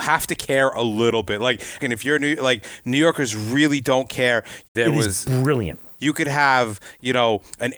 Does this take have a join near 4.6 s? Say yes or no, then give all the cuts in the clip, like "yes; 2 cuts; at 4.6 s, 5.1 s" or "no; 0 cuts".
yes; 3 cuts; at 1.8 s, 4.6 s, 6.0 s